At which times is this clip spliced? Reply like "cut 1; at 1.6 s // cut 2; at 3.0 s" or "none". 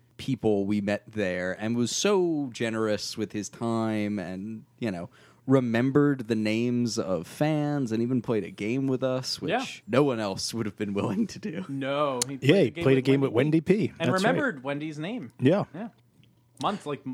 cut 1; at 9.8 s